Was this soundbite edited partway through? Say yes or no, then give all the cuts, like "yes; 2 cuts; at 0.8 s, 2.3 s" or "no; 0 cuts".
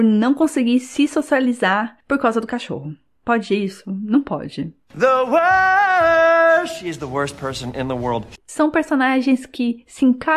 yes; 1 cut; at 8.4 s